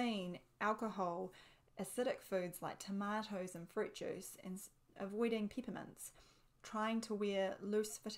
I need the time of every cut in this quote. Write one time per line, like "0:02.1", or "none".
0:01.7